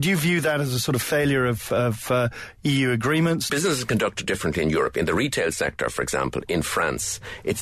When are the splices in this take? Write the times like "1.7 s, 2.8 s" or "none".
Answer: 3.5 s